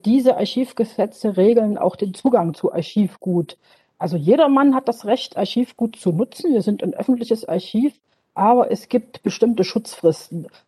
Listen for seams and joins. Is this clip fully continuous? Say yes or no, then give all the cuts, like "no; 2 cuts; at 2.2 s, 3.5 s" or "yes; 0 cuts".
yes; 0 cuts